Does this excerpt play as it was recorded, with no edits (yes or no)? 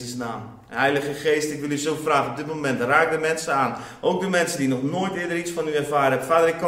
yes